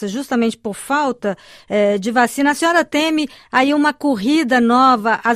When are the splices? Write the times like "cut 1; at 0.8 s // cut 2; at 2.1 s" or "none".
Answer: none